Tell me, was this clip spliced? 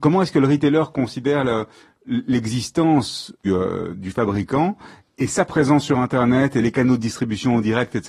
yes; 1 cut; at 3.4 s

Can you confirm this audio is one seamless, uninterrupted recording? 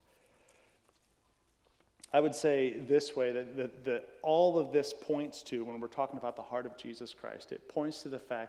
yes; 0 cuts

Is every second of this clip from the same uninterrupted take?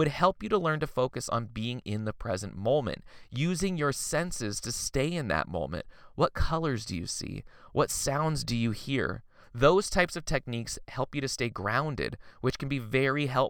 no; 1 cut; at 9.4 s

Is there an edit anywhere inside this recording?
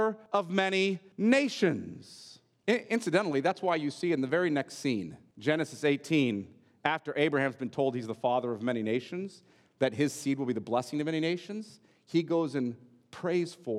no; 0 cuts

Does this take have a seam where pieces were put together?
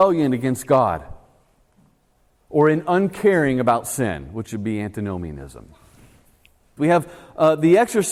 yes; 1 cut; at 6.8 s

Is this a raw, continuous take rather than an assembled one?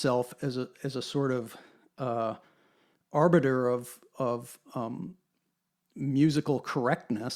yes; 0 cuts

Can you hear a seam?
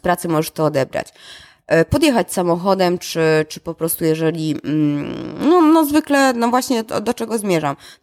no; 0 cuts

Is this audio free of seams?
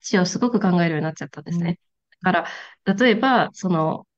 yes; 0 cuts

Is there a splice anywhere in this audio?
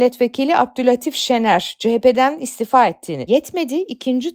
yes; 1 cut; at 3.3 s

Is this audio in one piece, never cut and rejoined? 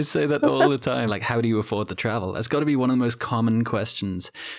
no; 1 cut; at 1.1 s

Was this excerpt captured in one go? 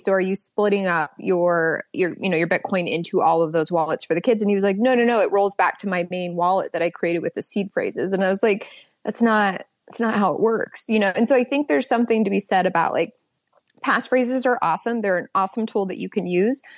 yes; 0 cuts

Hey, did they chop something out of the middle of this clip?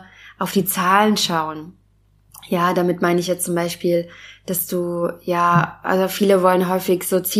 no; 0 cuts

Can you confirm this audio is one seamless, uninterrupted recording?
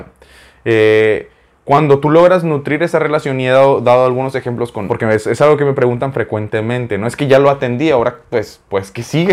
no; 1 cut; at 4.9 s

